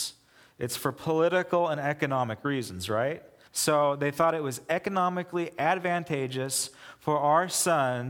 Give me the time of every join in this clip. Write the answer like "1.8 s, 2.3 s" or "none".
3.5 s